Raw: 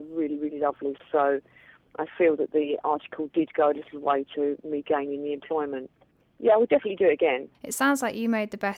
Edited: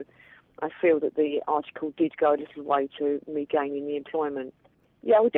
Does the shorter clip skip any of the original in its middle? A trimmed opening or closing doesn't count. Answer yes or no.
no